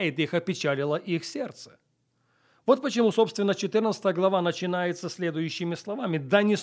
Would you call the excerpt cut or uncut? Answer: uncut